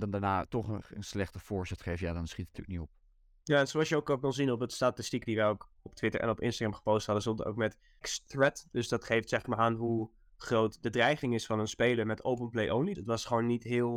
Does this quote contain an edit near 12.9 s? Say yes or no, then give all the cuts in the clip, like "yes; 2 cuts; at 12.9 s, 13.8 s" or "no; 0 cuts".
yes; 2 cuts; at 8.0 s, 12.9 s